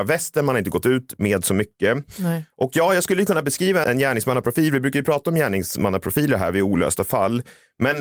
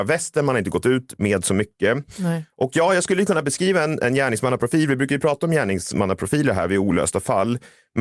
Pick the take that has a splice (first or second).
first